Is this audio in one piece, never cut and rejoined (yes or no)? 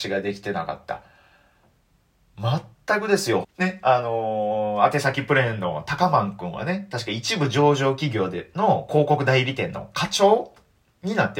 no